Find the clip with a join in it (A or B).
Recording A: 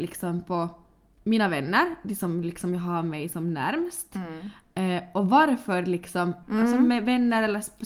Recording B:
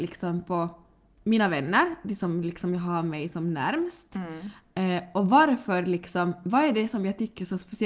A